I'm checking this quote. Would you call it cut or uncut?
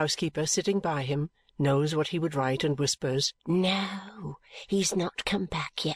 cut